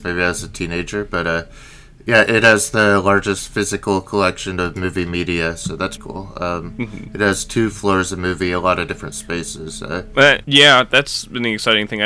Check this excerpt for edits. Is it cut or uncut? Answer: cut